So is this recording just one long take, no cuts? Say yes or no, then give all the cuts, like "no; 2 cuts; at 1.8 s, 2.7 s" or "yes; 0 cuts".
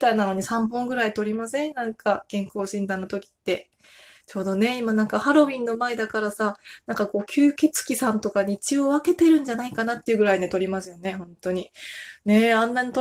yes; 0 cuts